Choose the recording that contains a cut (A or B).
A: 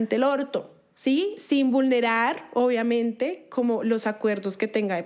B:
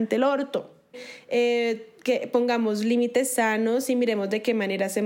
B